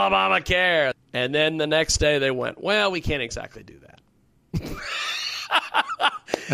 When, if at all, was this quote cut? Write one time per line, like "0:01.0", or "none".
0:00.9